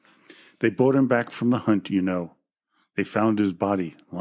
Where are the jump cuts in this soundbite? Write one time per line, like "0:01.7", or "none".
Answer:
none